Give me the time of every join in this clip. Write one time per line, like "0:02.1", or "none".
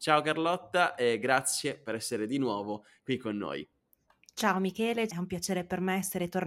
0:05.1